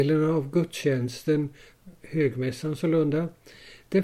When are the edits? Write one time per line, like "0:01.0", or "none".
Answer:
none